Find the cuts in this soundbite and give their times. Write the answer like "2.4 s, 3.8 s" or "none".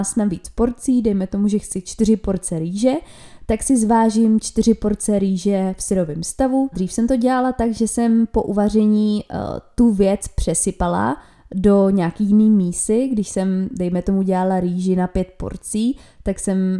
6.7 s